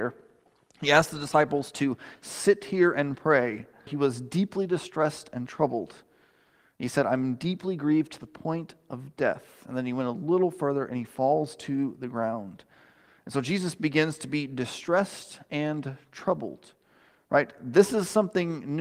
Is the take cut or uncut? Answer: cut